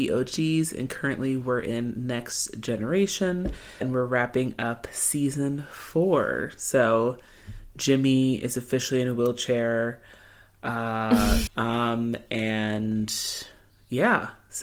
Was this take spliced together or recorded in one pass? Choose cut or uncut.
cut